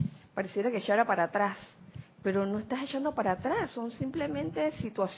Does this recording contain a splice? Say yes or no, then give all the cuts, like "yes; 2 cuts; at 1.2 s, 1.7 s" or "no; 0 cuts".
no; 0 cuts